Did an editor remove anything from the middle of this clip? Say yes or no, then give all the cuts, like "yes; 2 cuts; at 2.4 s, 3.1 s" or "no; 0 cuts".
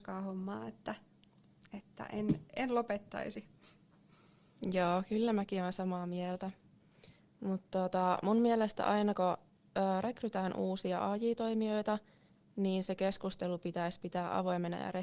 no; 0 cuts